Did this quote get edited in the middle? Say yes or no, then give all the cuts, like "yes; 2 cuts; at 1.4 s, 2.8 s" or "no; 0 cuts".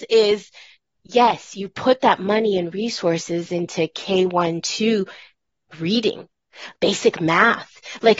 yes; 1 cut; at 6.7 s